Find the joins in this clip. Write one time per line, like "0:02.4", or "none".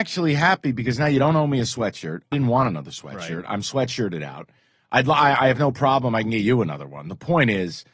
0:02.3